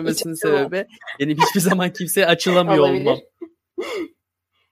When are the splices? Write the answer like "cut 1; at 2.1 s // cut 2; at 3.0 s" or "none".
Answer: none